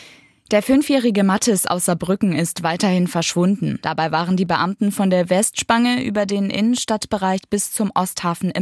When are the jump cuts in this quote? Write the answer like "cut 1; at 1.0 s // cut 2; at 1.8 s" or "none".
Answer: cut 1; at 3.8 s